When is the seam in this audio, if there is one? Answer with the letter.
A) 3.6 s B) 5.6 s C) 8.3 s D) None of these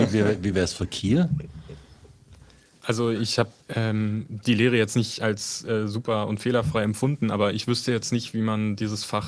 A